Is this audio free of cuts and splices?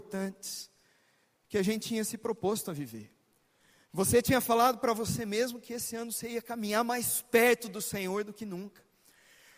yes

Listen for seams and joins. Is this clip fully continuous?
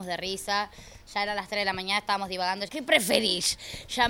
no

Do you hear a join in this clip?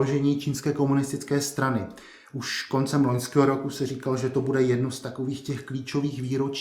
no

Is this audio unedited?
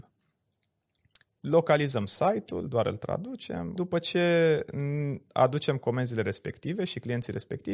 no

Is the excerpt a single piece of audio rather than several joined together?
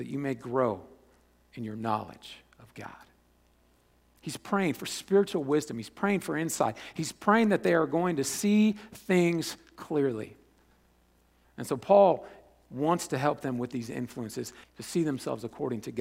no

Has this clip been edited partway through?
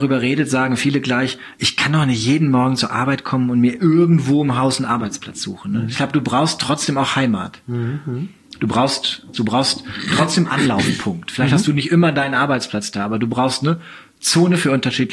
yes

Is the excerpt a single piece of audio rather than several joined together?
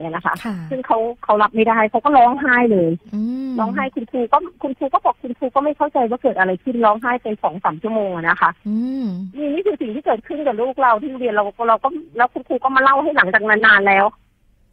no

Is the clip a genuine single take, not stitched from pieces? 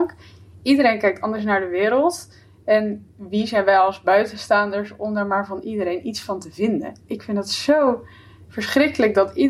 yes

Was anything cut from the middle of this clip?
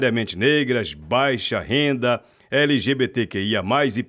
no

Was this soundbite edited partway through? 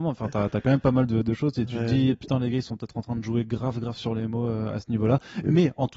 no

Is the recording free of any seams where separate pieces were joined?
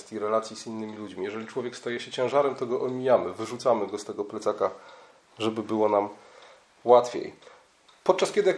yes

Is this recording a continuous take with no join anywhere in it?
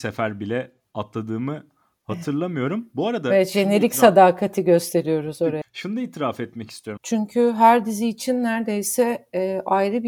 no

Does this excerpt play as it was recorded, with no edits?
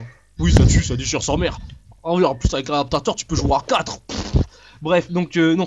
yes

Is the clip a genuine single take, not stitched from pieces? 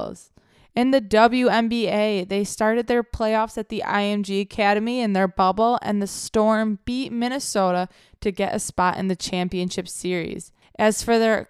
yes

